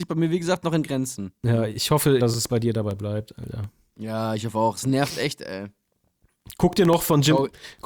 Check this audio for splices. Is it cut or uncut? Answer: cut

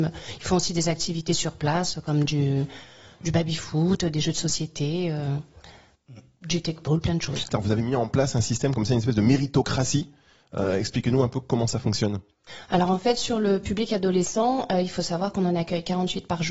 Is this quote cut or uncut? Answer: cut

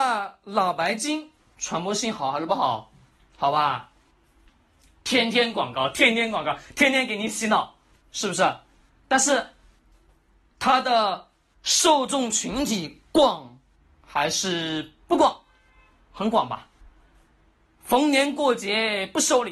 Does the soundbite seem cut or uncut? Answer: uncut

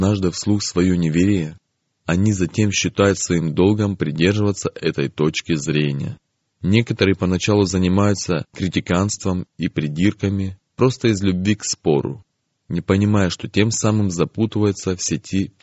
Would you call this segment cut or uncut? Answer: cut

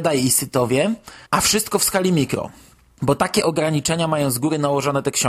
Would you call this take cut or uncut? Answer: cut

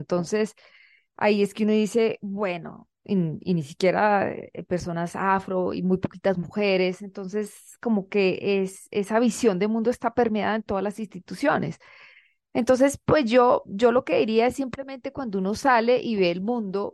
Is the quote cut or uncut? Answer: uncut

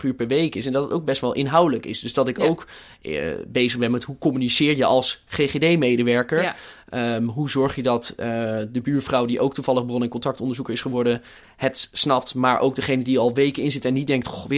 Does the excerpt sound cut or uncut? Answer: uncut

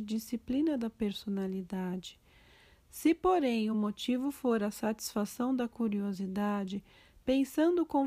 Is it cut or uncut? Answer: uncut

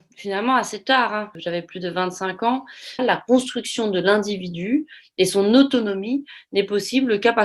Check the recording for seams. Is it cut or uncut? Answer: cut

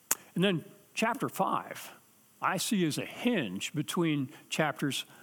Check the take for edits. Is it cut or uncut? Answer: uncut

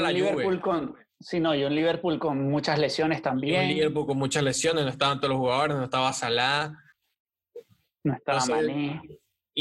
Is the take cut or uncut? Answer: uncut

